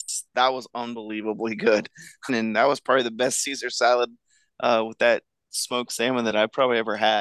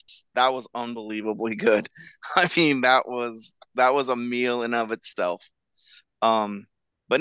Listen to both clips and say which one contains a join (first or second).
first